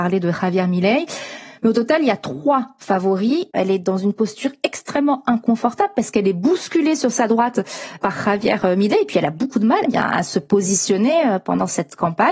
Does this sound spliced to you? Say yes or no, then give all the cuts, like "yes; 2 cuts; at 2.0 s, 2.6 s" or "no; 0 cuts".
yes; 2 cuts; at 3.5 s, 9.9 s